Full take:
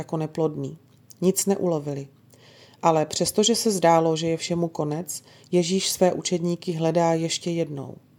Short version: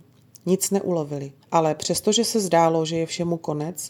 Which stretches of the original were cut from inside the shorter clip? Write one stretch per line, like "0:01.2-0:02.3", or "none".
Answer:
0:02.2-0:02.7

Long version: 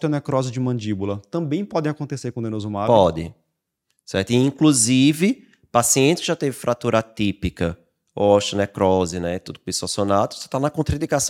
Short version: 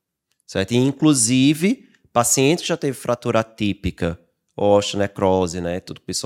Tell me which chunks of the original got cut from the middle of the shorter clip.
none

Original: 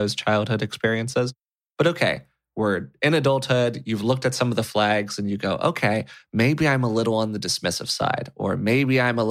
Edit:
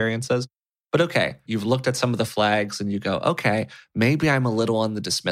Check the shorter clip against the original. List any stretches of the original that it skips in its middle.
0:02.3-0:03.8

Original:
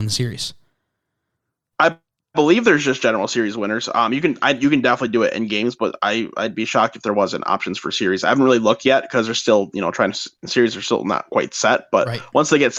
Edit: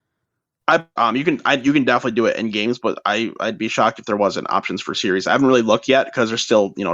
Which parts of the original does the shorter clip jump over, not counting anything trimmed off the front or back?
0:02.1-0:03.9

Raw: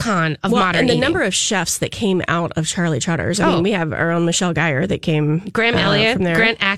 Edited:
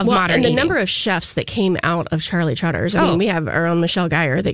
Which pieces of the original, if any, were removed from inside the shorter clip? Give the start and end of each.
none

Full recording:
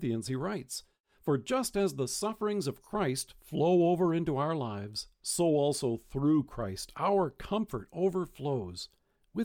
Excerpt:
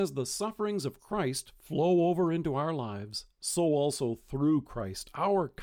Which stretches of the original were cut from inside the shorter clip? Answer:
none

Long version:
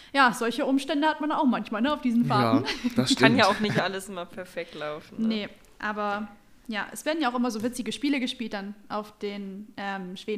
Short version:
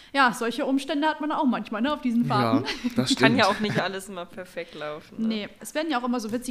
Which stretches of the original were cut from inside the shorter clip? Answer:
0:05.6-0:06.9

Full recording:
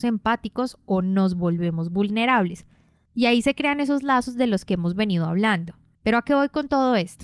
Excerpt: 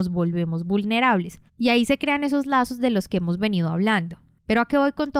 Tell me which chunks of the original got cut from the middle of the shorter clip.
0:02.7-0:03.0

